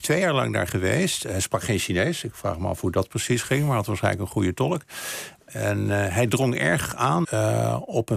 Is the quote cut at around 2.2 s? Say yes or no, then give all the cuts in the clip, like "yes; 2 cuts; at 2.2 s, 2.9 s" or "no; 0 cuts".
no; 2 cuts; at 5.5 s, 7.2 s